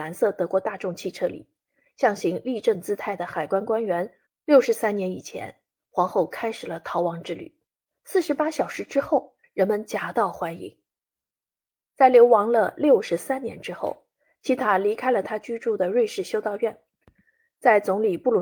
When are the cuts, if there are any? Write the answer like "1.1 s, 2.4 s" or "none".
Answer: 4.3 s, 9.4 s, 11.8 s